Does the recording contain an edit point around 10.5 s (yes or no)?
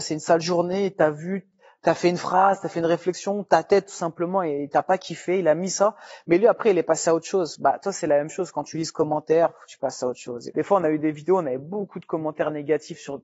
yes